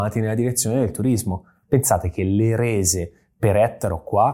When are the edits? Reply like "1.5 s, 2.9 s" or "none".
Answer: 1.6 s